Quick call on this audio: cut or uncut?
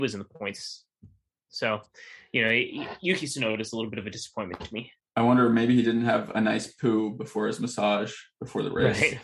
uncut